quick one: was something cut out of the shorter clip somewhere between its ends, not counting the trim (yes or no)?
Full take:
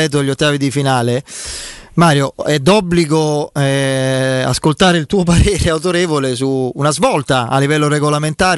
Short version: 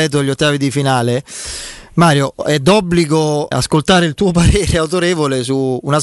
yes